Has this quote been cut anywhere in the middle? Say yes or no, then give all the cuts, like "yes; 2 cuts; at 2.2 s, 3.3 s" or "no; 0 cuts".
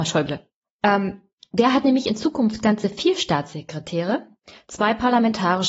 no; 0 cuts